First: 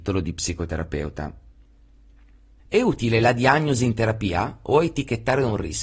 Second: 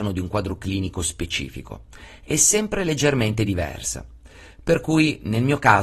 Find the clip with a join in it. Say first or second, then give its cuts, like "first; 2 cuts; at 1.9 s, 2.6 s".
first; 1 cut; at 2.6 s